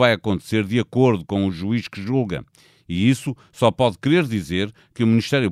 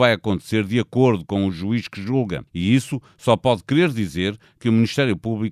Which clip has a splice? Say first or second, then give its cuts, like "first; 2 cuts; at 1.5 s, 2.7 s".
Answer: second; 1 cut; at 2.5 s